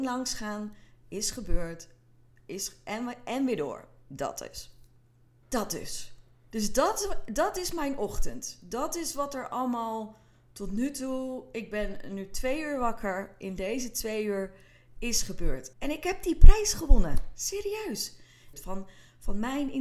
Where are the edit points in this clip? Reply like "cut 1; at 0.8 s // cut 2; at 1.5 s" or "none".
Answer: cut 1; at 5.4 s // cut 2; at 15.7 s // cut 3; at 18.5 s